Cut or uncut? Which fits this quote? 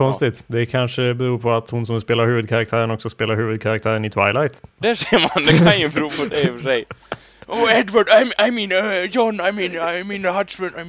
cut